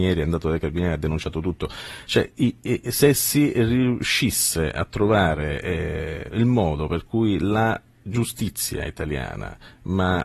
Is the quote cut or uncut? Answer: uncut